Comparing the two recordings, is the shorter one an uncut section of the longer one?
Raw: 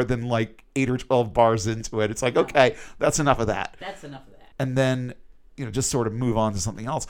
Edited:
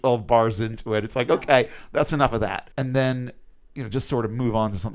no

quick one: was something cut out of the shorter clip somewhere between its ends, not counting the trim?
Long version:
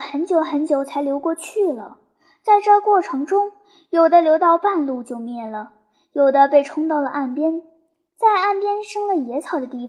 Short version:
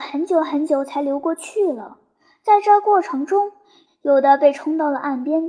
yes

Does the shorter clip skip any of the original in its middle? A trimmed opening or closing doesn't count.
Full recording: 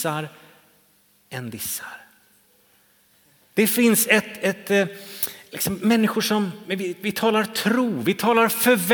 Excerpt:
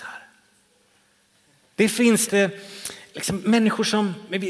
yes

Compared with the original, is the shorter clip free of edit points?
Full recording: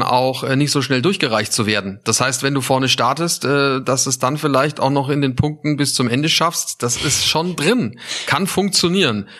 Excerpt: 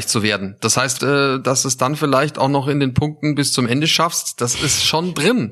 no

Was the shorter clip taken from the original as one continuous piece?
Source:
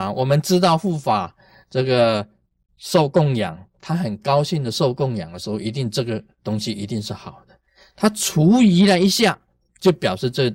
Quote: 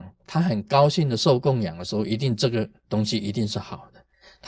yes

